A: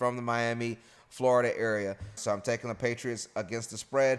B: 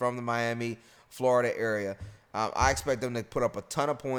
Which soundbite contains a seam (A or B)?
A